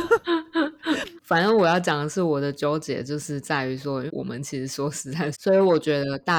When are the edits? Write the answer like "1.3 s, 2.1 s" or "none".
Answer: 1.2 s, 4.1 s, 5.3 s

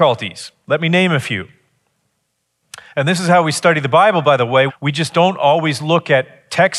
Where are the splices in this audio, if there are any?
4.7 s

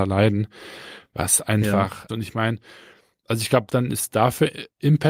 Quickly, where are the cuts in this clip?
2.1 s, 3.7 s

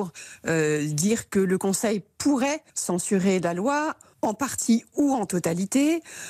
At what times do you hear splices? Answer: 2.7 s

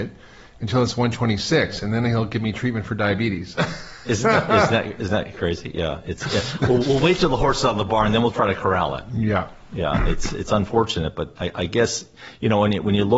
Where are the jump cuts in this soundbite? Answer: 6.8 s, 11.4 s

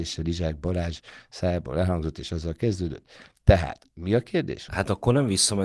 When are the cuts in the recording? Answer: 4.7 s

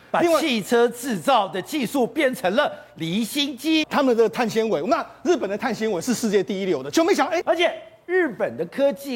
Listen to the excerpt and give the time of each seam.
3.8 s, 7.4 s

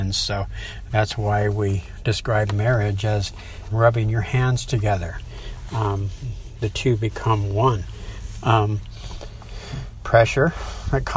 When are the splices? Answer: 3.7 s

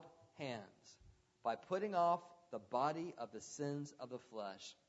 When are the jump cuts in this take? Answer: none

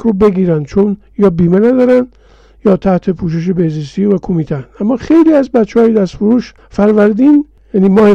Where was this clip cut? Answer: none

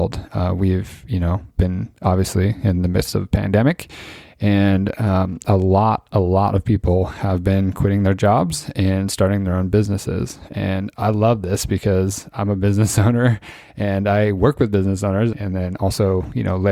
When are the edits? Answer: 15.3 s

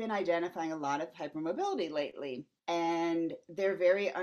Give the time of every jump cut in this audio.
2.6 s

